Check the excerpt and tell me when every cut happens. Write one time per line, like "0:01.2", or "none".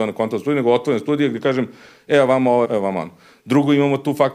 0:02.6